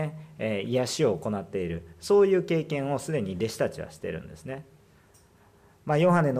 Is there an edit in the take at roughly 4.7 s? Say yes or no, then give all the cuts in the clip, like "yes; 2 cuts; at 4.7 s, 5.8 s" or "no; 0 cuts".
no; 0 cuts